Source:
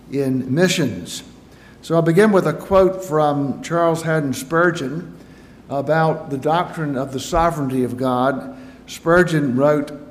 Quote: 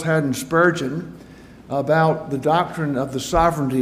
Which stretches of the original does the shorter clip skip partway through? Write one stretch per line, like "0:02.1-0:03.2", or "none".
none